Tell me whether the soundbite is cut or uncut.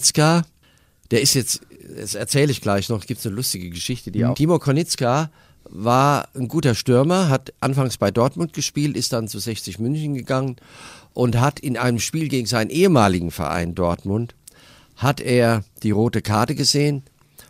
cut